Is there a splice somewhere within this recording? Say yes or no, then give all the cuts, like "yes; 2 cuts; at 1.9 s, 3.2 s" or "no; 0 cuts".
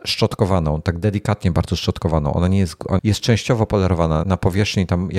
yes; 2 cuts; at 3.0 s, 4.2 s